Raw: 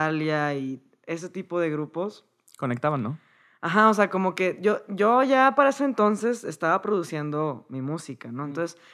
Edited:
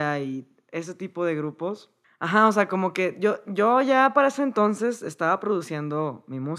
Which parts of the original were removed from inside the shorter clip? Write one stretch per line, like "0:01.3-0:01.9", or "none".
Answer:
0:02.4-0:03.5